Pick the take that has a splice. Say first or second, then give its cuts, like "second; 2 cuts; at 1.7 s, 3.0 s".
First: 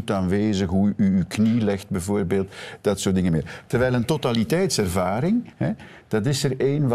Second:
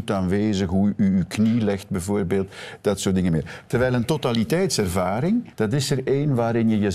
second; 1 cut; at 5.5 s